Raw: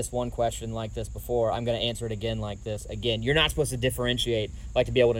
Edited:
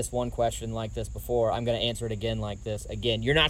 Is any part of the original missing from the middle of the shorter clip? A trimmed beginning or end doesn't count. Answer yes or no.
no